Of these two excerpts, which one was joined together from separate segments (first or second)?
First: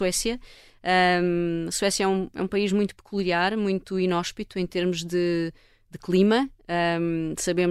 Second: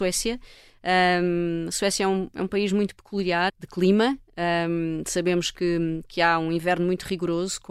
second